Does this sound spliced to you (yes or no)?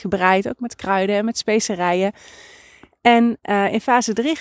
no